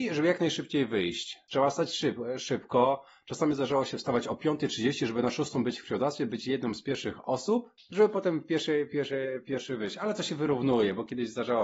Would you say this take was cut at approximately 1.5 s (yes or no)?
no